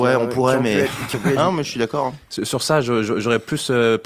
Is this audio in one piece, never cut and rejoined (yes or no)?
no